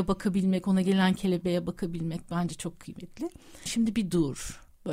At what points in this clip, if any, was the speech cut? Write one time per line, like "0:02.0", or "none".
0:03.7